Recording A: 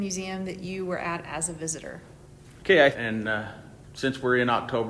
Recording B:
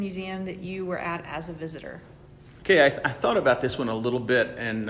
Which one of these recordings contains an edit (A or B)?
A